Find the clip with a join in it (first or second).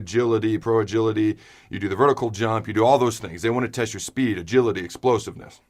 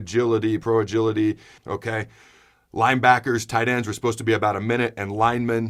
second